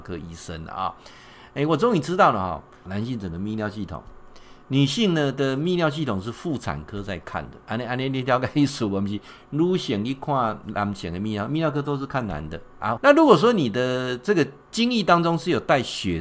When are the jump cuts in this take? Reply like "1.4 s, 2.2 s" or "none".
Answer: 2.9 s, 13.0 s